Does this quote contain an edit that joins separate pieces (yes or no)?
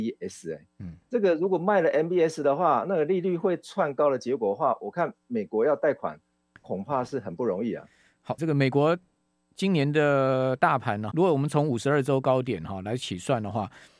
yes